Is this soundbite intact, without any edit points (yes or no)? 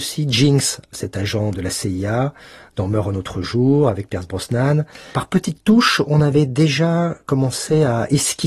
yes